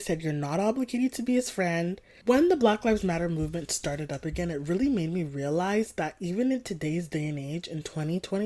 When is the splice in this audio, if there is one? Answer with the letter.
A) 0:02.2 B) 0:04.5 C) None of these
A